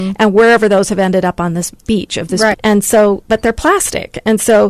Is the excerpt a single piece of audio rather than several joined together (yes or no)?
no